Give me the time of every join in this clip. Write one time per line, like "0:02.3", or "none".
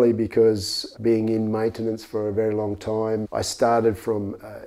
0:03.2